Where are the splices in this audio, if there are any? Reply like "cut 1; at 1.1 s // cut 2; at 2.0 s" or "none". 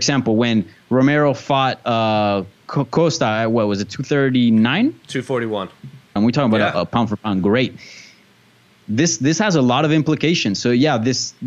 cut 1; at 6.2 s